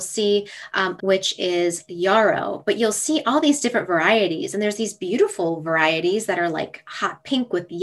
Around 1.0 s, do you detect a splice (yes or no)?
yes